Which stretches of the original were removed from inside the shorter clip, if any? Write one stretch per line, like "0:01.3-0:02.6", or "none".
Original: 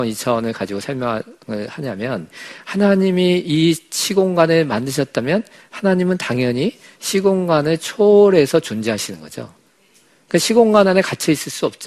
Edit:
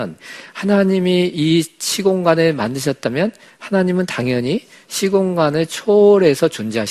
none